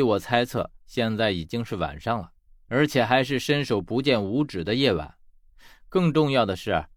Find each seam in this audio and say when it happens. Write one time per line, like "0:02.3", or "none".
none